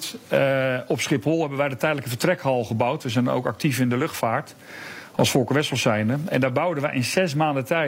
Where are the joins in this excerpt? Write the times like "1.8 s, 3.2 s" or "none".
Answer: none

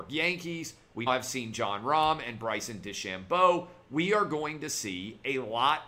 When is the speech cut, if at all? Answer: 1.1 s

